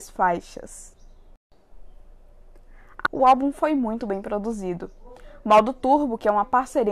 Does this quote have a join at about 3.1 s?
yes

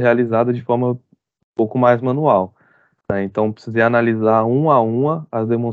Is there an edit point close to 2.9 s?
no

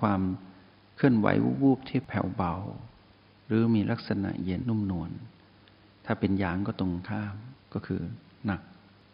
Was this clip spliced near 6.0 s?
no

